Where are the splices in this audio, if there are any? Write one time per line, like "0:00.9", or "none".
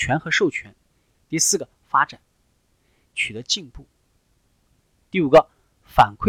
0:01.1
0:03.0